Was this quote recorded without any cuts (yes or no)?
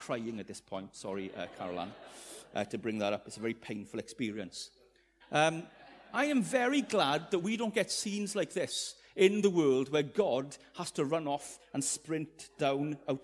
no